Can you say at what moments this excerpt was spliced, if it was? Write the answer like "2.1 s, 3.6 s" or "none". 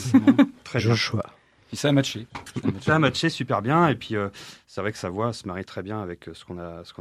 none